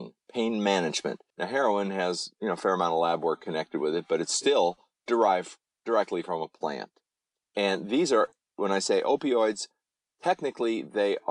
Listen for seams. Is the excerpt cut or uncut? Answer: cut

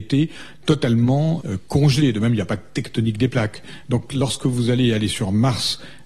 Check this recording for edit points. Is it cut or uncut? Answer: cut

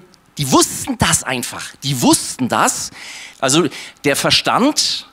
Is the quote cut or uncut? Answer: cut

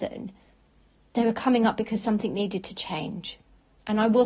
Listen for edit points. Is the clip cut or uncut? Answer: uncut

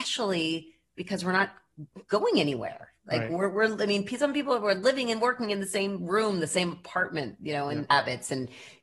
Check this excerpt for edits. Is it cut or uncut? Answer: cut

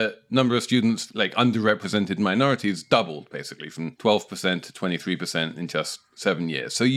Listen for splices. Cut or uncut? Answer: uncut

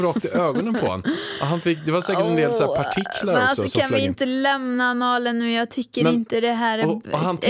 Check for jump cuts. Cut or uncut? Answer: uncut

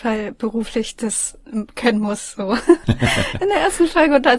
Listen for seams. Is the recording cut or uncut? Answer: cut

